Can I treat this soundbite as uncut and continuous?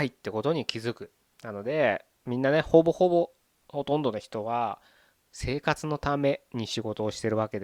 no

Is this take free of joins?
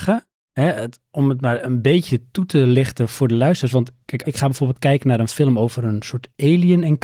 no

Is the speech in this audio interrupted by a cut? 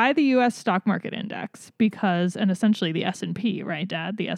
no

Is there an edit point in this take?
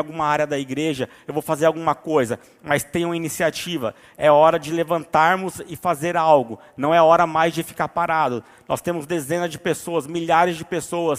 no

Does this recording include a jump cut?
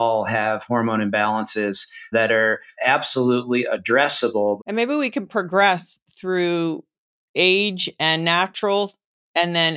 yes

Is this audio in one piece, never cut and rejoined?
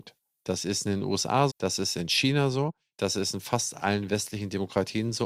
no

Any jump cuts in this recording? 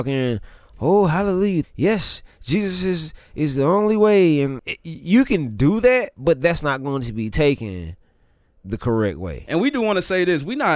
yes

